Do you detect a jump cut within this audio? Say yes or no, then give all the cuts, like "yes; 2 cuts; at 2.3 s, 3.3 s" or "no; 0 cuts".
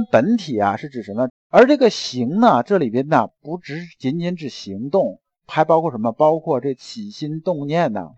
yes; 1 cut; at 1.3 s